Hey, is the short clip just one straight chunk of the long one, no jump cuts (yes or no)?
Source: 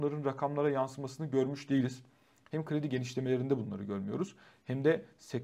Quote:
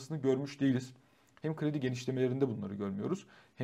yes